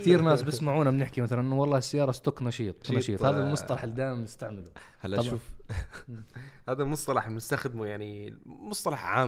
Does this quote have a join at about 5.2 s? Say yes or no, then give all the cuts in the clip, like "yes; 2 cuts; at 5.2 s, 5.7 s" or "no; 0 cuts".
no; 1 cut; at 2.8 s